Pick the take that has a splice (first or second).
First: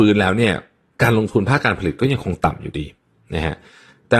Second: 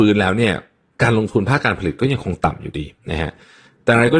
second